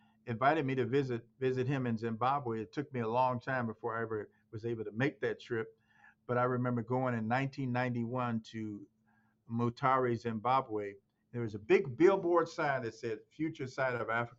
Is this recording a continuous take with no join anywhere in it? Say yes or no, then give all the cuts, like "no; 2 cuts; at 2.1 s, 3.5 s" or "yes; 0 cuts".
no; 1 cut; at 1.3 s